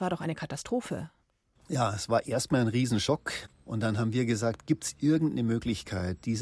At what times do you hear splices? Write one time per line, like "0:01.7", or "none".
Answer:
none